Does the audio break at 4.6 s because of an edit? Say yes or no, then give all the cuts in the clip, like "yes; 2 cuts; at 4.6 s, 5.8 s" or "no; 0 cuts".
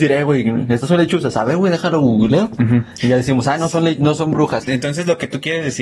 yes; 1 cut; at 4.6 s